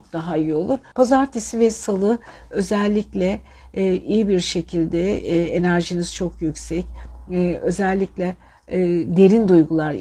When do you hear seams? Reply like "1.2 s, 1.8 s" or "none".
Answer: 0.9 s